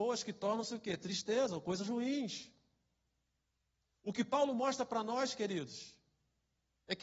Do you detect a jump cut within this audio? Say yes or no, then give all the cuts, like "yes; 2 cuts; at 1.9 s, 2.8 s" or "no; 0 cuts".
no; 0 cuts